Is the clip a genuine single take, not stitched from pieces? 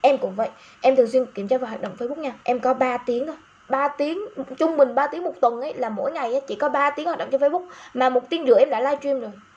no; 1 cut; at 2.4 s

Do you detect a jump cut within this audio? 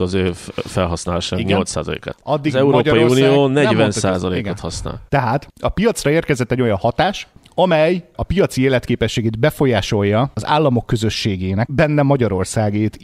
yes; 2 cuts; at 5.1 s, 11.7 s

